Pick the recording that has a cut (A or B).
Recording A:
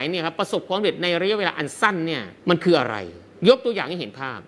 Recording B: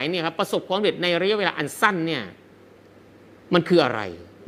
A